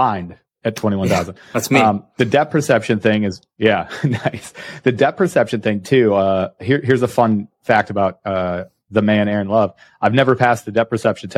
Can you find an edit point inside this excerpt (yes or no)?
no